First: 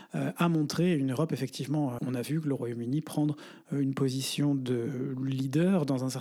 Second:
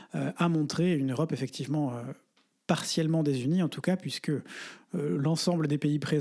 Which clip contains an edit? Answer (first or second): first